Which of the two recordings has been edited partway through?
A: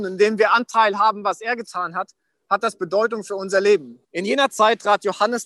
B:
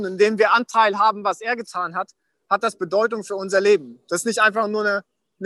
A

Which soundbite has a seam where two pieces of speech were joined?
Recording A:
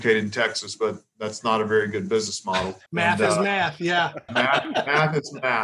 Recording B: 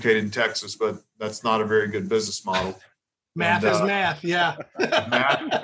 A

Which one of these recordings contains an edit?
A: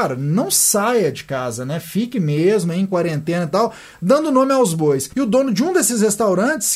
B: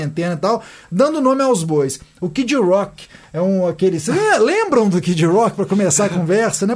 A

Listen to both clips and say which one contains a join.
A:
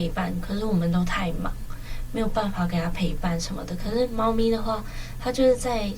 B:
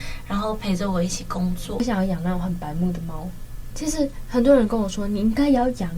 B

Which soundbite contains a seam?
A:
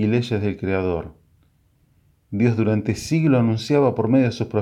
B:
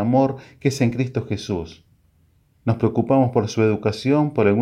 B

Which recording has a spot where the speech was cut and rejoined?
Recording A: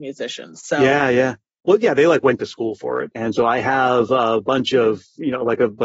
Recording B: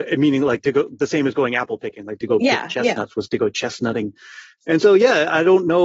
A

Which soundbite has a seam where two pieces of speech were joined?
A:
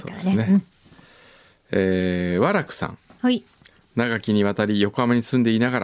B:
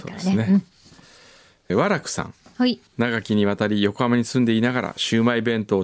B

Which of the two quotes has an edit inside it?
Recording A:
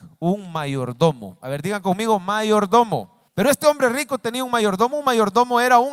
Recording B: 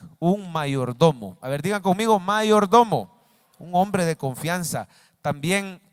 A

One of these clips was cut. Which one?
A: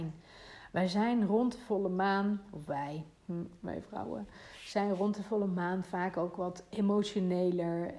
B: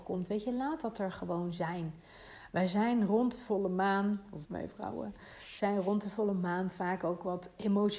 B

